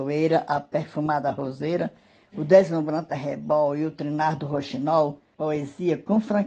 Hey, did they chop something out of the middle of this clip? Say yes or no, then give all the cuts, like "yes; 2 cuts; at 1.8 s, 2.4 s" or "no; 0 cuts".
yes; 1 cut; at 5.3 s